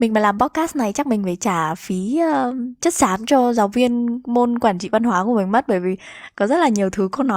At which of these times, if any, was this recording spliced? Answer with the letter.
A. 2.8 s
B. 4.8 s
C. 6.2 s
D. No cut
A